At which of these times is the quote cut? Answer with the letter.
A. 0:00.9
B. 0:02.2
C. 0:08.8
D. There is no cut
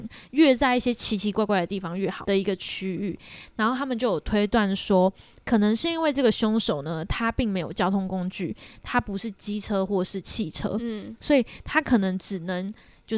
B